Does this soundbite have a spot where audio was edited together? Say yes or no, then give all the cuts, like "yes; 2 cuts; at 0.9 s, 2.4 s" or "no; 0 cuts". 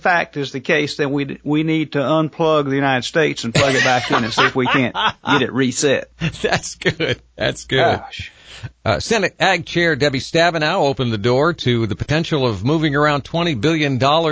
no; 0 cuts